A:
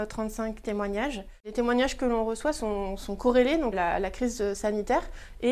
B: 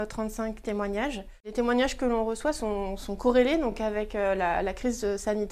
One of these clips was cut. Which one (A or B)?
A